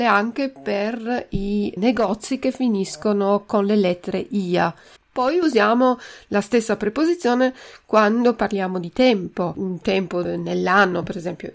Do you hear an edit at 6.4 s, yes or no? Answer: no